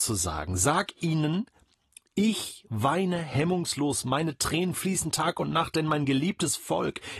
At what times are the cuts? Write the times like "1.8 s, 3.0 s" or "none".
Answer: none